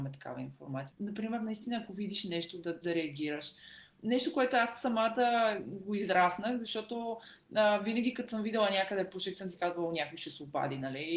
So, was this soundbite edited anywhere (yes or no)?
yes